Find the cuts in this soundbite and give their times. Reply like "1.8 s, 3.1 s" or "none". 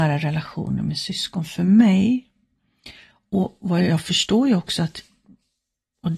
none